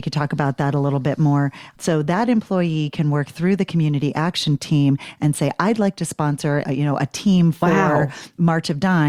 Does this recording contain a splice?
yes; 2 cuts; at 1.7 s, 6.6 s

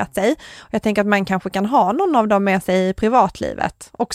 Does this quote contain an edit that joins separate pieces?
no; 0 cuts

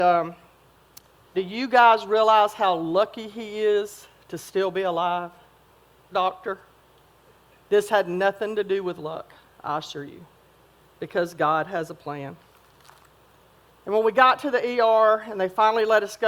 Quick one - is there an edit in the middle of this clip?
yes; 3 cuts; at 1.3 s, 6.1 s, 13.7 s

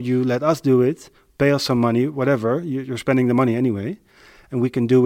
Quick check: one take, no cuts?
yes; 0 cuts

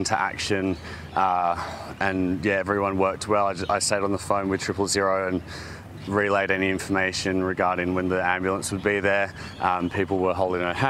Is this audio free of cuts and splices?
yes; 0 cuts

